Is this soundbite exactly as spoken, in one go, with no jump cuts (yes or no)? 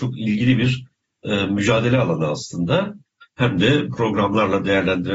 no